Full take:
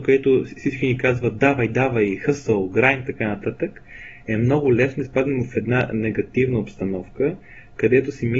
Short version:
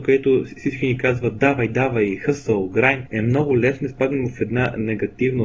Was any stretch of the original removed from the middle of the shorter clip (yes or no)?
yes